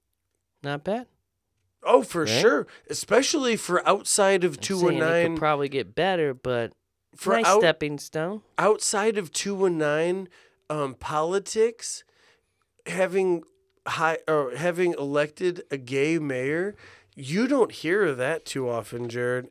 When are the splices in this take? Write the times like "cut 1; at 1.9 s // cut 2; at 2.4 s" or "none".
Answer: none